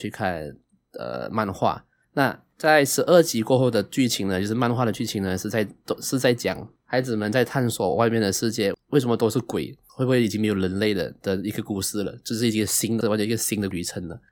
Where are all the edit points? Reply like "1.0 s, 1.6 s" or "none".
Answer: 13.0 s

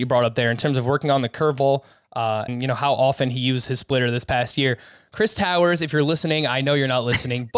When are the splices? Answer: 2.5 s

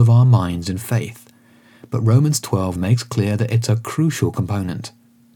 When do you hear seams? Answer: 2.8 s

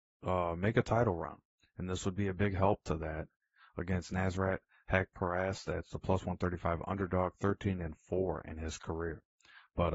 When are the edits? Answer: none

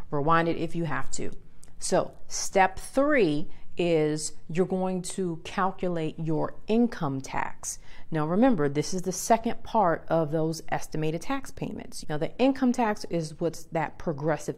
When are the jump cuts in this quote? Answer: 12.0 s

